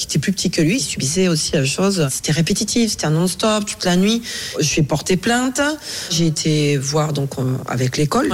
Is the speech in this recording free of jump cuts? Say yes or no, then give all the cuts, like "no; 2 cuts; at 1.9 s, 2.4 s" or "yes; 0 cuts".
yes; 0 cuts